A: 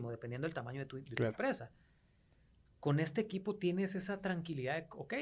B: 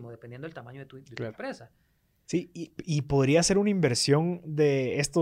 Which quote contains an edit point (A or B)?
B